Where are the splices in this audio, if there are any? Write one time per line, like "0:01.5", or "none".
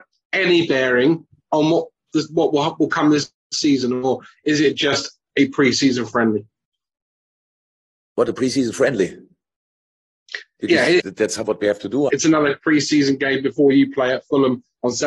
0:11.0
0:12.1